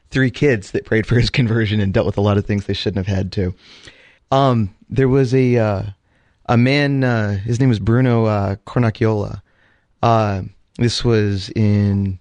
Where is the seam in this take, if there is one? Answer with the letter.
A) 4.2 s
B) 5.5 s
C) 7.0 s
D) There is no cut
A